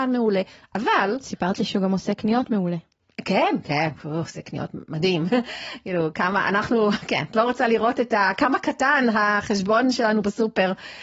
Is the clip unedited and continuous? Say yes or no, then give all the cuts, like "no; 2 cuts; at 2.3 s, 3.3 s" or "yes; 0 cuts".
yes; 0 cuts